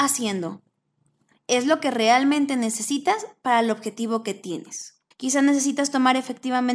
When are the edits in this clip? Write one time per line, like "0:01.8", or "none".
0:05.1